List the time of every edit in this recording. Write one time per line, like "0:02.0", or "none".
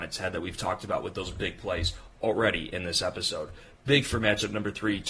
none